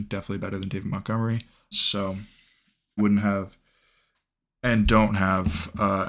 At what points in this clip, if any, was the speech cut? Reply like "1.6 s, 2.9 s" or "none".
1.7 s, 3.0 s